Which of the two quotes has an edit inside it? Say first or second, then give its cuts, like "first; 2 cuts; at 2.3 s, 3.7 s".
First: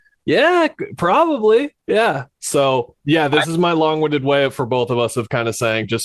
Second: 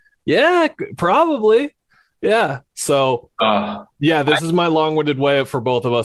first; 2 cuts; at 1.8 s, 3.0 s